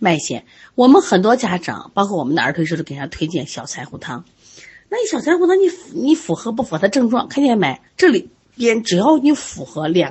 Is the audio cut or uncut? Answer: cut